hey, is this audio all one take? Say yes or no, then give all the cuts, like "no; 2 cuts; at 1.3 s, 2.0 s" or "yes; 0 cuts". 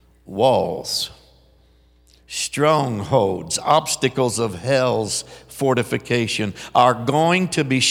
yes; 0 cuts